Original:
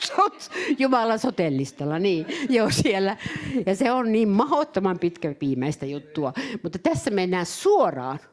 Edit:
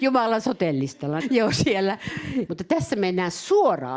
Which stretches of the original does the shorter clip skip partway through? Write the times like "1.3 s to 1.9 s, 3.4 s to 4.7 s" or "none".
2.0 s to 2.4 s, 3.6 s to 6.6 s

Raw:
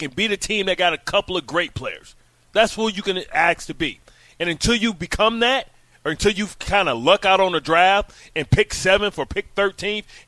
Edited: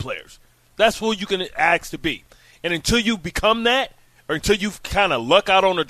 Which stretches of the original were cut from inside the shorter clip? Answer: none

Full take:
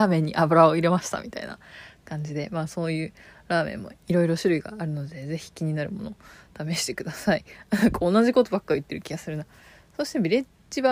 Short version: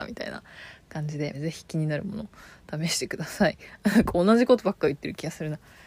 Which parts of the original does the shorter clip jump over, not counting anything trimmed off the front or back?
2.5 s to 5.2 s

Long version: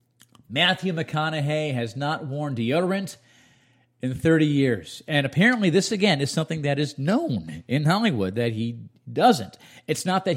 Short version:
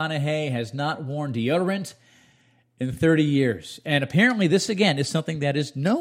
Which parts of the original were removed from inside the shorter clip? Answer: none

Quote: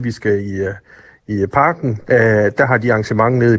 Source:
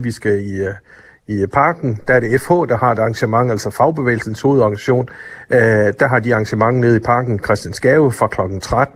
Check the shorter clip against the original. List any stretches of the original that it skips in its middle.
2.0 s to 5.5 s

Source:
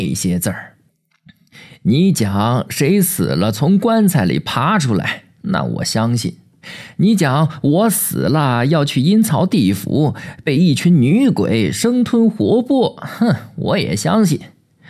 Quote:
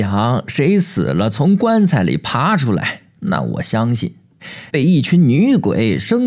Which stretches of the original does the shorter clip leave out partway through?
6.9 s to 10.4 s

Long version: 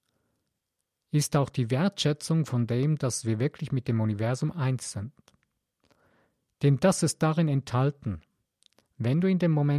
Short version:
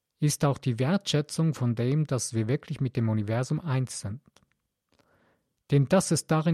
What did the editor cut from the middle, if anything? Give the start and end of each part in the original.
none

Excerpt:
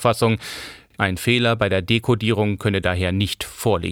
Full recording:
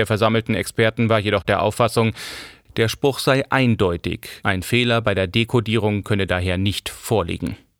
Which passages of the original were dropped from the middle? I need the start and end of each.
2.7 s to 4.4 s

